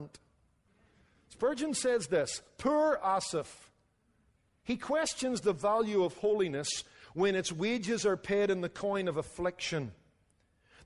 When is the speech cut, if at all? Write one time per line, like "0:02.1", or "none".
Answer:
none